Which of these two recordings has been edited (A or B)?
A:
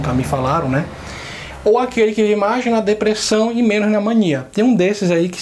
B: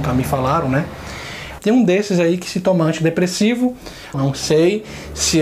B